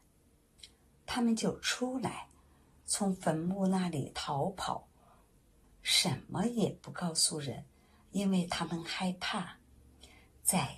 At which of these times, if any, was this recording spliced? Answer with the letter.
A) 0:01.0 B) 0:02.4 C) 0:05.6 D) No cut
C